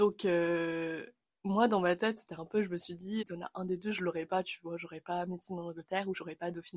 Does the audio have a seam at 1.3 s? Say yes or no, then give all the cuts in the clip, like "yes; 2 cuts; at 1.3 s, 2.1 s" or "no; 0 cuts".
no; 1 cut; at 3.2 s